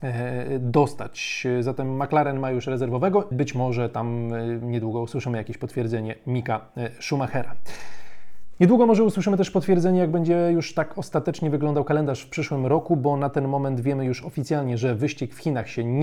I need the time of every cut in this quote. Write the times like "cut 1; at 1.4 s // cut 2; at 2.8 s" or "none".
cut 1; at 3.3 s